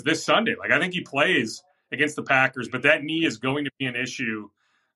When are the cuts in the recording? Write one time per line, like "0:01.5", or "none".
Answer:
none